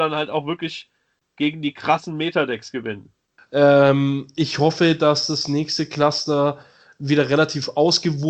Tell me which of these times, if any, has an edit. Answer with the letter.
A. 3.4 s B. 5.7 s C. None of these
A